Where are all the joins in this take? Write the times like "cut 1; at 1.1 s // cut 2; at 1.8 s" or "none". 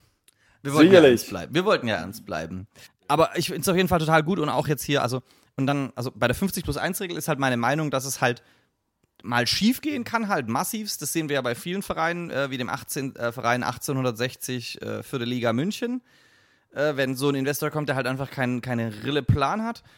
none